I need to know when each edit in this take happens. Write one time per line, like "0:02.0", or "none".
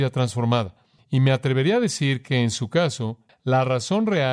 0:03.3